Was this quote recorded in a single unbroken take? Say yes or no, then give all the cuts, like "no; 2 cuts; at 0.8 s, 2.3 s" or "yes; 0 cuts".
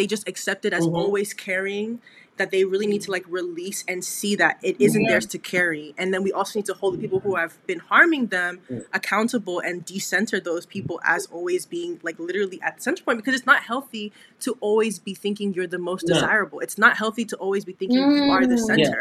yes; 0 cuts